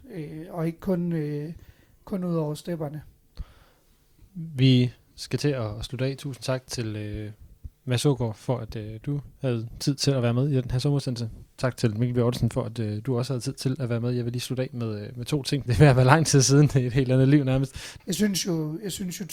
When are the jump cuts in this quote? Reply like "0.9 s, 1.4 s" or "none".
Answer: 15.7 s, 18.0 s